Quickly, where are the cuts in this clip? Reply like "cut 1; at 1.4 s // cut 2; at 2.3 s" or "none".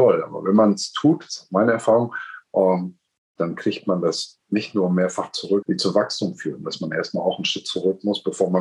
cut 1; at 4.4 s // cut 2; at 5.6 s

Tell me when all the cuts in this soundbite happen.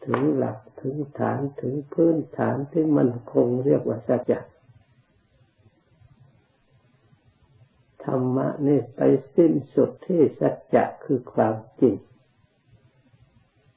cut 1; at 4.2 s // cut 2; at 10.0 s

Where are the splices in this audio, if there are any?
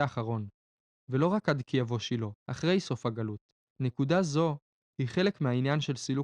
cut 1; at 2.3 s // cut 2; at 3.7 s

